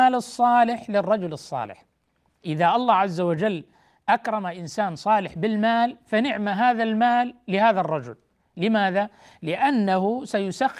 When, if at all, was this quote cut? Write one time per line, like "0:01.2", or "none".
none